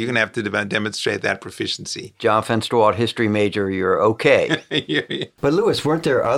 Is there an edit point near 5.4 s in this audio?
yes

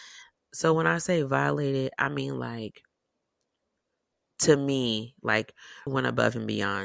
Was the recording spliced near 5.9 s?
yes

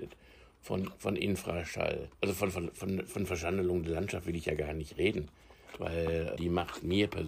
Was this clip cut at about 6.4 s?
yes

